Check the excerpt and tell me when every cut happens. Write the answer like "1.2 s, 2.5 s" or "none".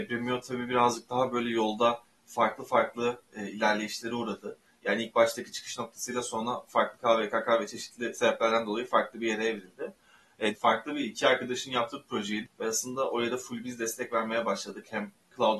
10.5 s, 12.5 s